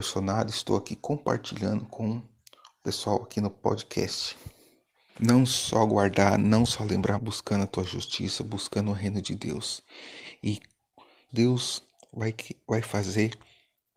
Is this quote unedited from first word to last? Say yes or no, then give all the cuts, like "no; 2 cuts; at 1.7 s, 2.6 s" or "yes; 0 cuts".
no; 3 cuts; at 5.1 s, 7.2 s, 11.3 s